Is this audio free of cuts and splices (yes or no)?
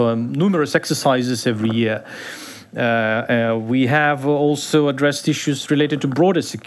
yes